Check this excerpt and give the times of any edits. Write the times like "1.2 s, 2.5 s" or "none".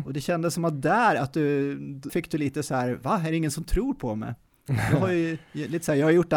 2.1 s